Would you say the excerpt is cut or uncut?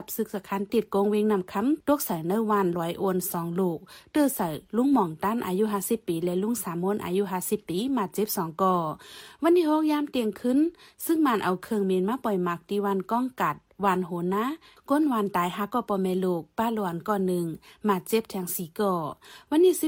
uncut